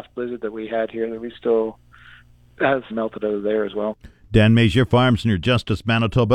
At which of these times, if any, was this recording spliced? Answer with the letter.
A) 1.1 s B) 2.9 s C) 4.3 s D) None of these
B